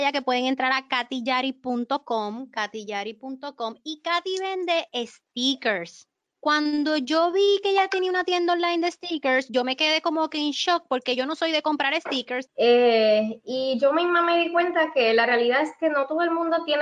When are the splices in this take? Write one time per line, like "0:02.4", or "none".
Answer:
0:12.5